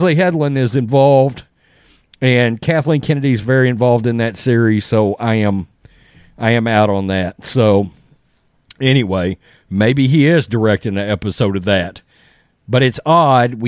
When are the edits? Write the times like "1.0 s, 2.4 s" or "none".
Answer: none